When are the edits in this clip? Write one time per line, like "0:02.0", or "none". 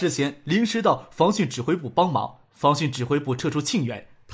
none